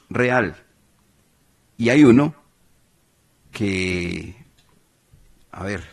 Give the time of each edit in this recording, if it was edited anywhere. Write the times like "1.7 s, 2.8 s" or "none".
none